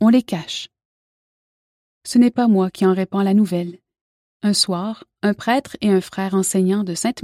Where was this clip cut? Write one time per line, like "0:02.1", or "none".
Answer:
0:04.2